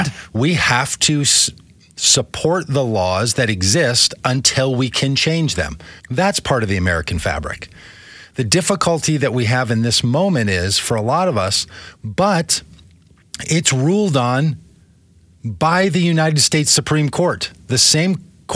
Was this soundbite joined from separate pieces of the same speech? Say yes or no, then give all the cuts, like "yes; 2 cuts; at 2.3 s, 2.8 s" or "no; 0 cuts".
yes; 2 cuts; at 6.0 s, 11.9 s